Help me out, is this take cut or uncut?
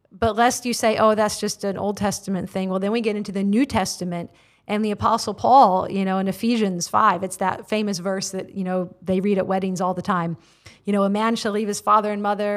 uncut